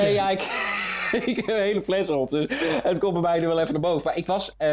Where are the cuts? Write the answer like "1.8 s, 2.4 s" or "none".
none